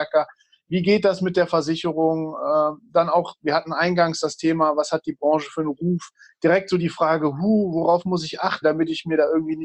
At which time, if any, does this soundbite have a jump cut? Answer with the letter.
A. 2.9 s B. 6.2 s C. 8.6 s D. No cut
C